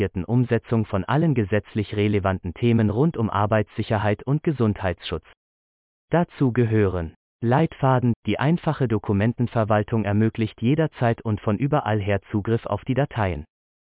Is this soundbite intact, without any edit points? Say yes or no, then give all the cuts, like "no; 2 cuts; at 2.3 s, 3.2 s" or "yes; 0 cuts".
no; 1 cut; at 8.1 s